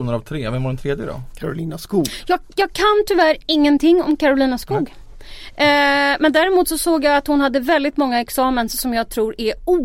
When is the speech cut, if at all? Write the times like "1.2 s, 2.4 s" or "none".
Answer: none